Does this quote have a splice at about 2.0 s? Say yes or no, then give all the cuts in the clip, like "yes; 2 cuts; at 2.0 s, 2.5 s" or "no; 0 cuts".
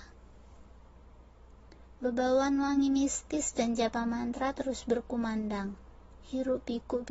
yes; 1 cut; at 2.0 s